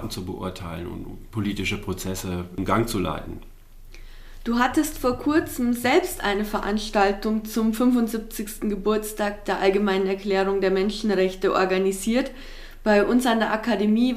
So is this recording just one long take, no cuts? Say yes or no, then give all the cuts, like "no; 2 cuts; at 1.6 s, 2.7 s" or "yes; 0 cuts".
yes; 0 cuts